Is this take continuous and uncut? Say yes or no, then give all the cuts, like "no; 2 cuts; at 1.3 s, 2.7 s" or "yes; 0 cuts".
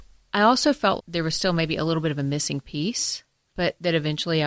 no; 1 cut; at 1.0 s